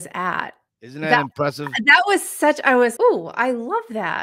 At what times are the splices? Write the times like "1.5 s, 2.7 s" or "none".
3.0 s